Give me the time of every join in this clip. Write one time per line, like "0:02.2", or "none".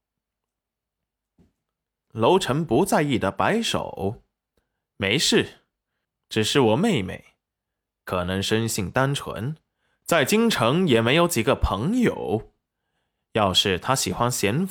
none